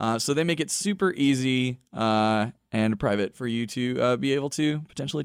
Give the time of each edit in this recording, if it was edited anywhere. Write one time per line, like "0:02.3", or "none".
none